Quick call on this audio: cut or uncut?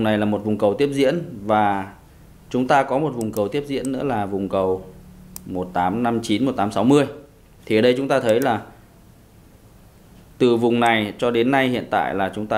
cut